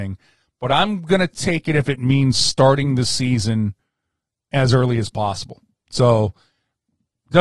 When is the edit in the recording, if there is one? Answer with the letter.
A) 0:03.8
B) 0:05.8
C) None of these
C